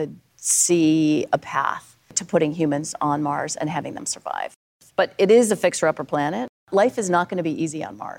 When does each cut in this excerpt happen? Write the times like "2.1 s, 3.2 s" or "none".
none

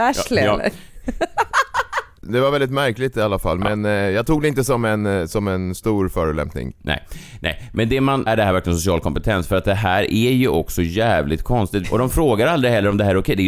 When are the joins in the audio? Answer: 8.3 s, 11.8 s

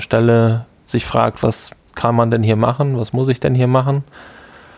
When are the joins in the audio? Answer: none

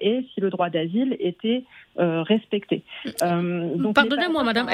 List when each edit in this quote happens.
none

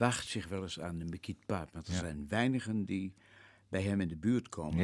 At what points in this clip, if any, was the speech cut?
none

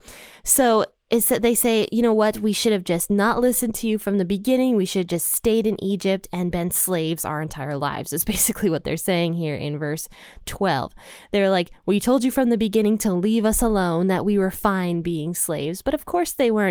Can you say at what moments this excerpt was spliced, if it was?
none

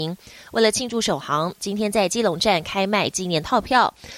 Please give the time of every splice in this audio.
none

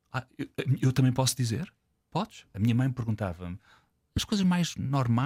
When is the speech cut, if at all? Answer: 2.5 s

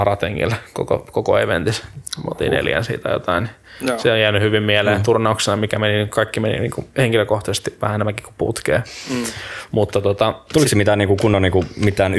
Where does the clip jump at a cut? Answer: none

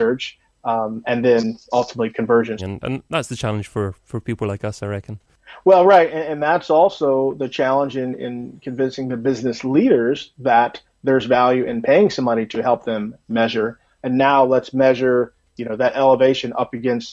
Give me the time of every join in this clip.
2.6 s, 14.0 s

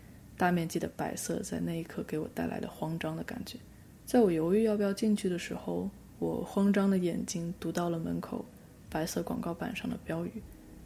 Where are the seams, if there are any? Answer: 4.0 s

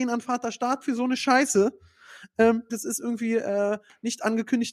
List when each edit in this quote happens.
2.7 s

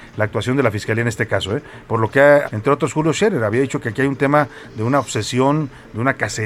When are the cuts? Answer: 2.4 s

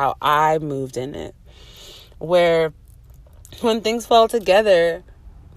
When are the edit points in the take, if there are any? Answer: none

